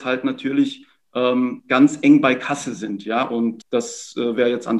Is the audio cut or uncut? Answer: cut